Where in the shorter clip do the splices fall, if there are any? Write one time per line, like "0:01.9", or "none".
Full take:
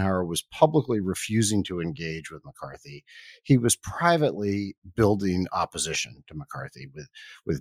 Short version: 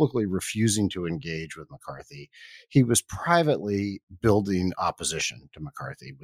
none